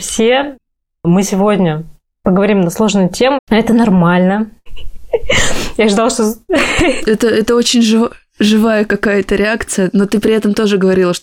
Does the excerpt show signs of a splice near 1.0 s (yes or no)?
no